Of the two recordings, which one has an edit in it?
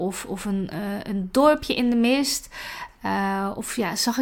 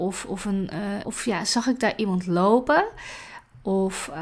second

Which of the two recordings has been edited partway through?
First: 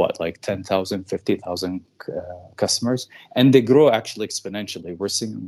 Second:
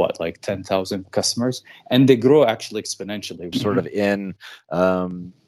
second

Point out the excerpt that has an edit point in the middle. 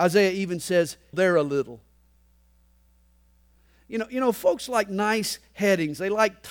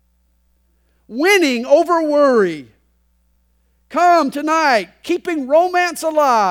first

